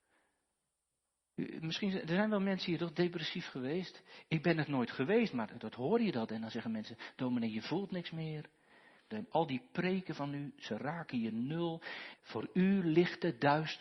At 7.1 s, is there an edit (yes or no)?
no